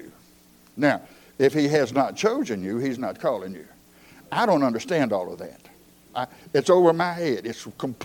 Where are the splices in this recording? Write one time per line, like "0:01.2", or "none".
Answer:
none